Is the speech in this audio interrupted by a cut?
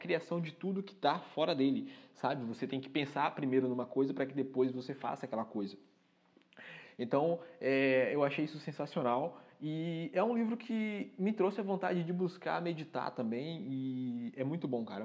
no; 0 cuts

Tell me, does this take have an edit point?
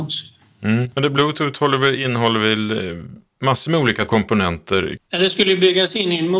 yes; 2 cuts; at 0.9 s, 5.0 s

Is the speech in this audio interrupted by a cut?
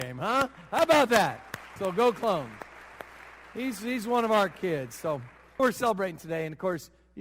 yes; 2 cuts; at 1.8 s, 5.6 s

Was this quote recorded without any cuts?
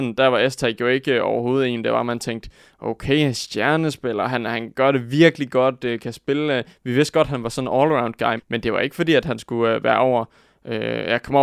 no; 1 cut; at 8.4 s

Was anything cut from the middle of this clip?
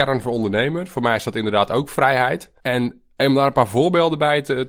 yes; 1 cut; at 2.6 s

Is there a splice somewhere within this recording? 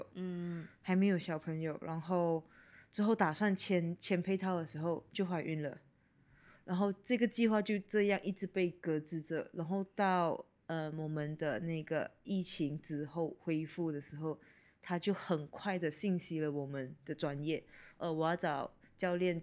no; 0 cuts

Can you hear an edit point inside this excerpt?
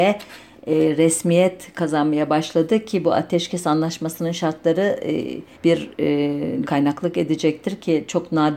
yes; 2 cuts; at 5.5 s, 6.6 s

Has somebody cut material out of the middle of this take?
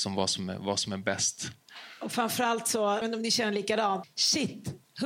yes; 2 cuts; at 3.0 s, 4.0 s

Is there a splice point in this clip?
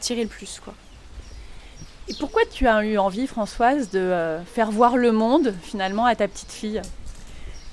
no; 0 cuts

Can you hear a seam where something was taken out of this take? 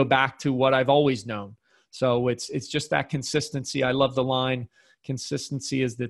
no; 0 cuts

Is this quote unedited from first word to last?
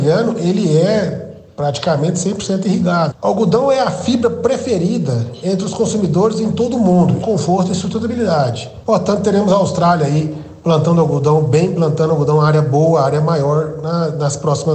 no; 3 cuts; at 3.1 s, 7.2 s, 8.8 s

